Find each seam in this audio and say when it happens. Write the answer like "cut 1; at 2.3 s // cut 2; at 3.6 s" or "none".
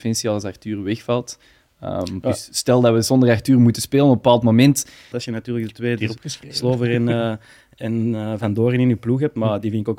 cut 1; at 5.1 s